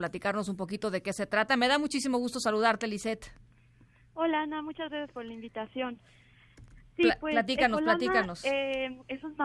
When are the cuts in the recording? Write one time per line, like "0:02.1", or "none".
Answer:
none